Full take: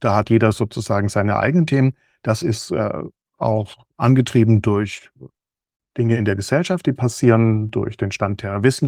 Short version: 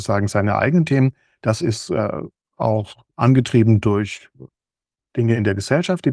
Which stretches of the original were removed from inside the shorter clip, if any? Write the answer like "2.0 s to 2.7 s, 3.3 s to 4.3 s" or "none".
none